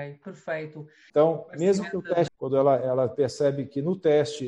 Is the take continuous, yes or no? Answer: no